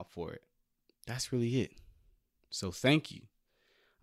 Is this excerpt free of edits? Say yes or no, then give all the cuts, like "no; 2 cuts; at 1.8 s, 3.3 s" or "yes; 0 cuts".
no; 1 cut; at 0.9 s